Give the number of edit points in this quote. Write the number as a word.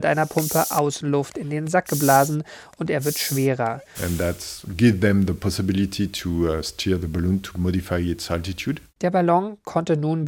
one